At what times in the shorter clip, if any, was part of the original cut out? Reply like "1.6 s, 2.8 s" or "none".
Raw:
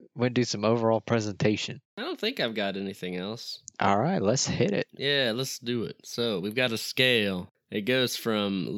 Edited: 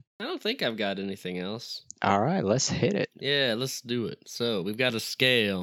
none